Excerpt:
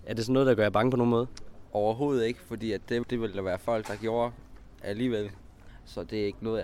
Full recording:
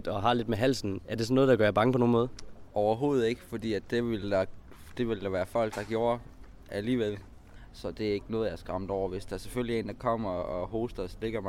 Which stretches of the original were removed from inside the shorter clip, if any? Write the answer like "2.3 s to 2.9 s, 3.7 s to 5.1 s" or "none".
4.0 s to 4.9 s